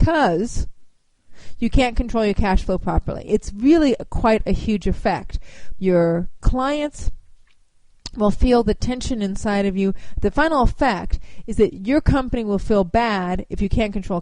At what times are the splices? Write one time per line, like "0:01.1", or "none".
0:05.8
0:10.2